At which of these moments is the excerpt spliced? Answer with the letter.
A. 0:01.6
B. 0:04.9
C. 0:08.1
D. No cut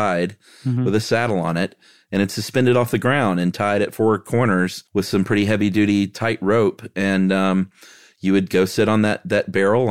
B